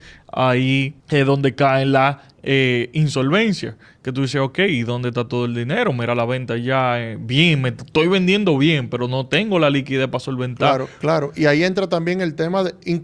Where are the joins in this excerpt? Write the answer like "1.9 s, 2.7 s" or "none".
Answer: 1.0 s, 11.0 s